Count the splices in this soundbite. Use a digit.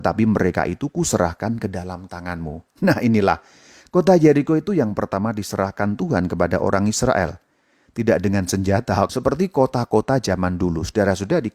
1